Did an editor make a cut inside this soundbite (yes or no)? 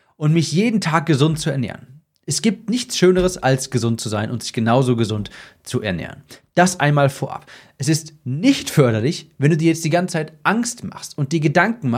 no